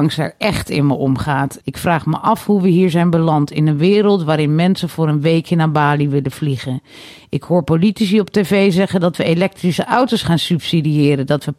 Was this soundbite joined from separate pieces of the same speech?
yes; 1 cut; at 1.6 s

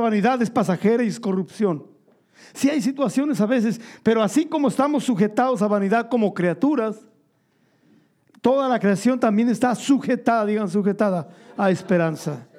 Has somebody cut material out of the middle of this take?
no; 0 cuts

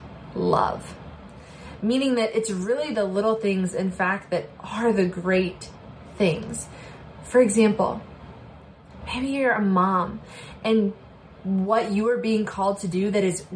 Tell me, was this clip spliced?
no; 0 cuts

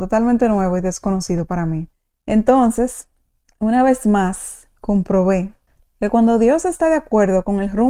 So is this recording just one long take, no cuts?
yes; 0 cuts

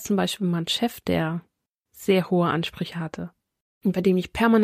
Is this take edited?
no; 0 cuts

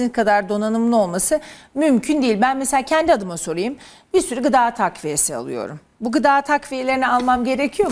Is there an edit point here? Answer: no; 0 cuts

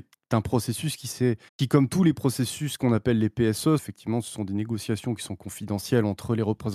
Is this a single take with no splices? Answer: no; 2 cuts; at 1.5 s, 3.8 s

